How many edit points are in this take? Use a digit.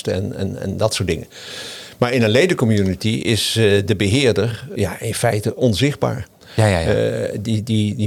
1